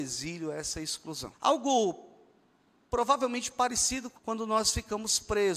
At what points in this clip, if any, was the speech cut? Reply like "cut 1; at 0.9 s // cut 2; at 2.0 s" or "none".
cut 1; at 1.3 s // cut 2; at 4.1 s